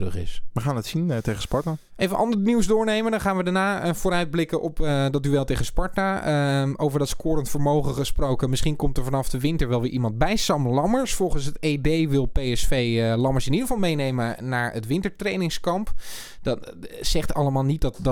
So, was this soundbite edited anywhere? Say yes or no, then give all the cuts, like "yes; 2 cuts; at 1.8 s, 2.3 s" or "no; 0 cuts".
no; 0 cuts